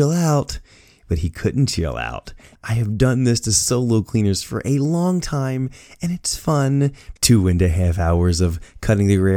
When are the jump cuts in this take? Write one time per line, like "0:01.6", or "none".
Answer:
0:02.5
0:07.2